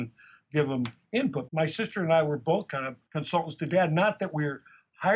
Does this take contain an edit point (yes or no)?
yes